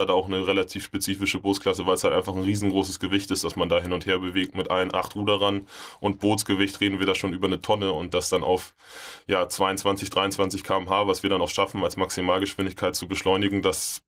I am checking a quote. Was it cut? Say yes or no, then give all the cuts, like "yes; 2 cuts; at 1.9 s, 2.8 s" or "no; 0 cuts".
no; 0 cuts